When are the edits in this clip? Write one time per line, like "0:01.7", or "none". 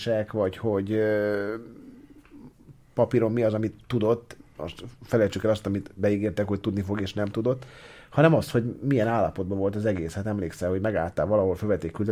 none